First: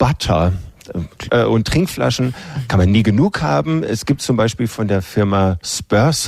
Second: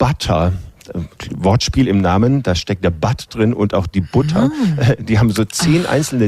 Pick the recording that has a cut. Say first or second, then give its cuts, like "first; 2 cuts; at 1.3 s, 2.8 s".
first; 1 cut; at 1.3 s